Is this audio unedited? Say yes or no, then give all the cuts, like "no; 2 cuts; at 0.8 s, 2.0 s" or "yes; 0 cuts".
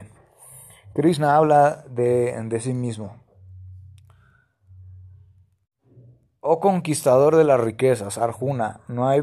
yes; 0 cuts